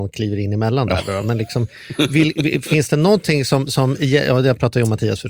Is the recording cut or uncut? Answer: uncut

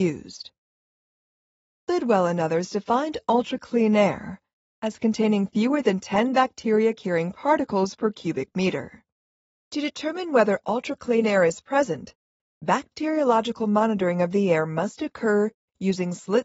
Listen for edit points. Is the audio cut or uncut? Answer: uncut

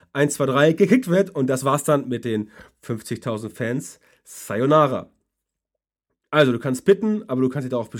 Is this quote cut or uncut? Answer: uncut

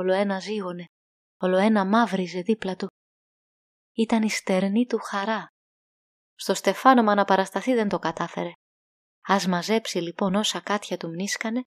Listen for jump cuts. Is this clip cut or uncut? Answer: uncut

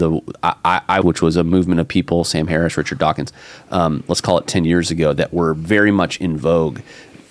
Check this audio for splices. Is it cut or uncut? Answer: cut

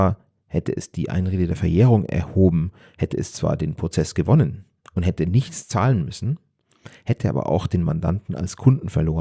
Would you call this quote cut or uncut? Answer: uncut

